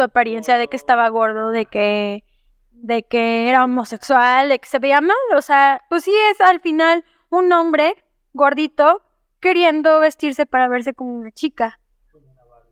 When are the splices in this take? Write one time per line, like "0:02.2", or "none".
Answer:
none